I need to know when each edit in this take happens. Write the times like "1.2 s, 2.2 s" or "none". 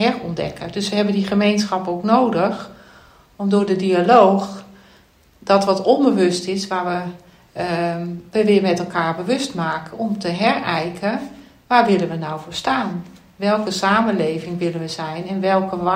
none